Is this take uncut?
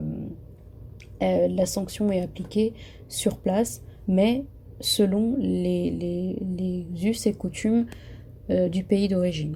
yes; 0 cuts

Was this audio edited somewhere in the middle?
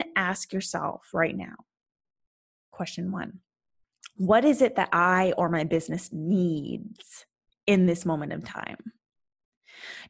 no; 0 cuts

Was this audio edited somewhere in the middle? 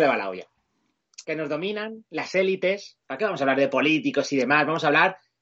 yes; 2 cuts; at 1.2 s, 3.0 s

